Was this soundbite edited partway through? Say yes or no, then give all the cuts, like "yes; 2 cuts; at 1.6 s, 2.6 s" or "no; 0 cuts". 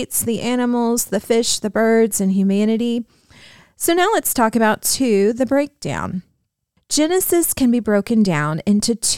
no; 0 cuts